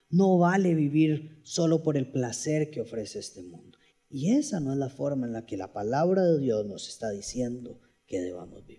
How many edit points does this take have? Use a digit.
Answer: 1